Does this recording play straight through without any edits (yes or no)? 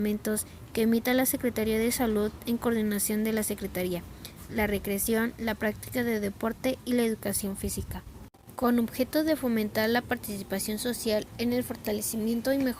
no